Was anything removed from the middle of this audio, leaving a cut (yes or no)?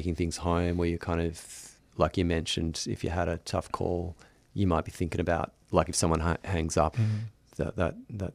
yes